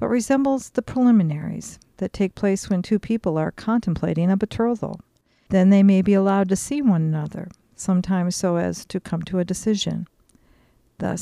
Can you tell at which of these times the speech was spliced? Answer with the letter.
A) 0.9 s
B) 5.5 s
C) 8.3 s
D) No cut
B